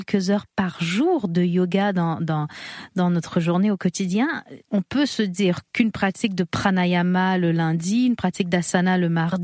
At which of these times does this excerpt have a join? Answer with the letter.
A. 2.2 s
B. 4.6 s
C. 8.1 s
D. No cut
B